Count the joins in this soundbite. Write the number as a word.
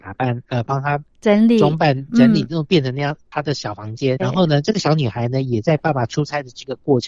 one